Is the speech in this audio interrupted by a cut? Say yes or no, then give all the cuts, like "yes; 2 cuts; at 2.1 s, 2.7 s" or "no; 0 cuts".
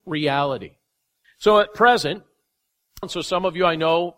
yes; 2 cuts; at 1.2 s, 3.0 s